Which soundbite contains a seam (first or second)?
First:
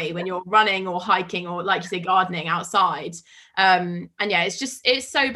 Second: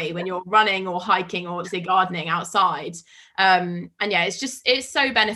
second